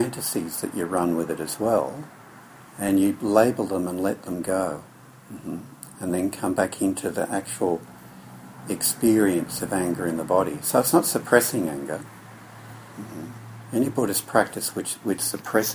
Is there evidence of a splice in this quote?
no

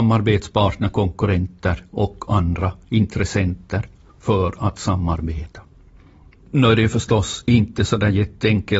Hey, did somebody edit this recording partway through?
no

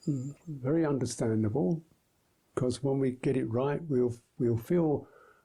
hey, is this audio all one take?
yes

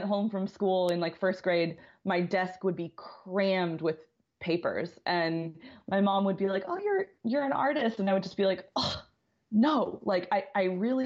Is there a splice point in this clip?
no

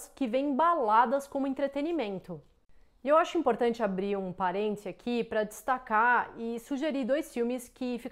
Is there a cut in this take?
no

